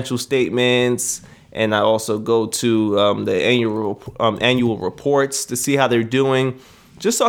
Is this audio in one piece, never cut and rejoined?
yes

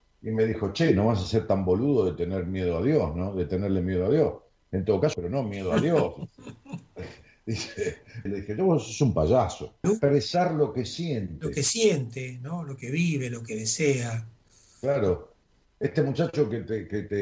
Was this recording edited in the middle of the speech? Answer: yes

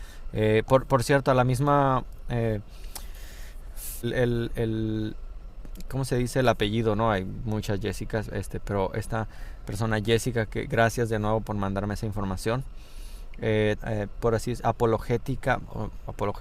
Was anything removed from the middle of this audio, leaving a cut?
yes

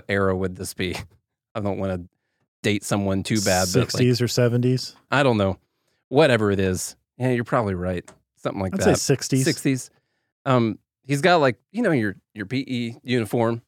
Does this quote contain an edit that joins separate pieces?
yes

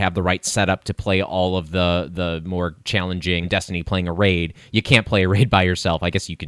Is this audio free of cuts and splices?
no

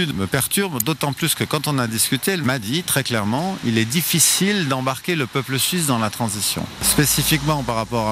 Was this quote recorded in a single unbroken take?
no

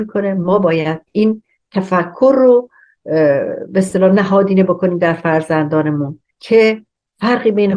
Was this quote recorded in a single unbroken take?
no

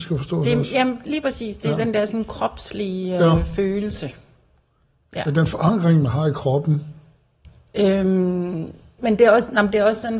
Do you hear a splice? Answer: yes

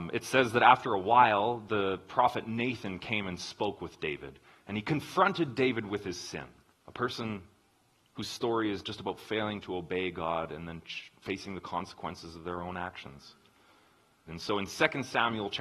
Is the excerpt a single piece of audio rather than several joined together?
no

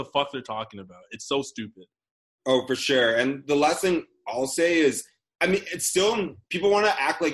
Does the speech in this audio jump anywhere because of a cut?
no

